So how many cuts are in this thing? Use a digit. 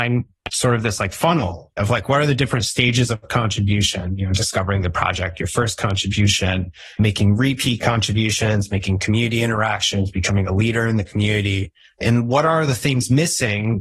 0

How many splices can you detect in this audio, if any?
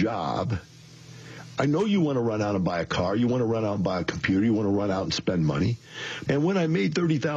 1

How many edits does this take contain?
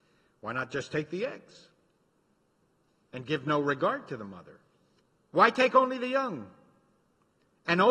1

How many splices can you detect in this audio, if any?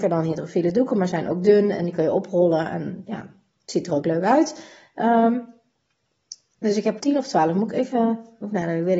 1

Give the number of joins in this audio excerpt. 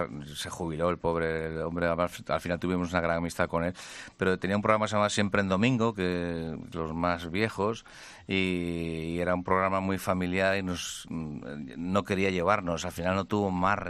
1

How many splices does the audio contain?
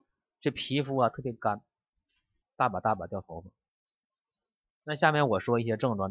2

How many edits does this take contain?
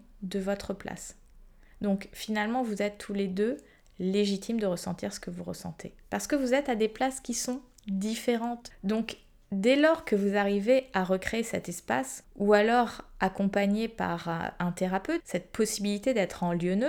3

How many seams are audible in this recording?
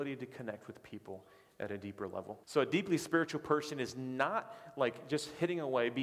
1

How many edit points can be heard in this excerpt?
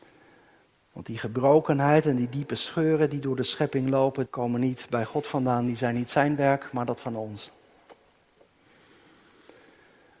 1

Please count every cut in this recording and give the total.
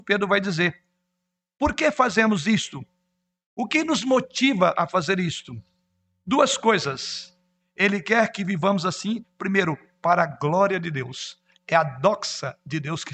0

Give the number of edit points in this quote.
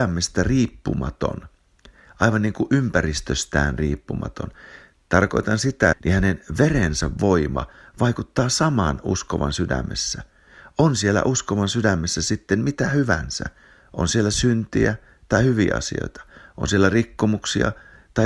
1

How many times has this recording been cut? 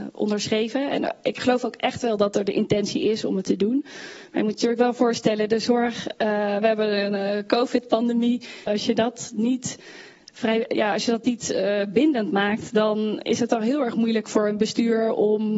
1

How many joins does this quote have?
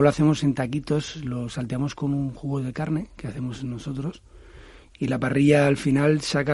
1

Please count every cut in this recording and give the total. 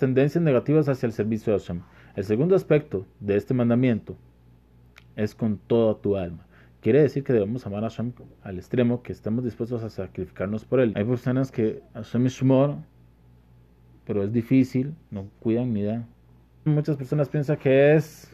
2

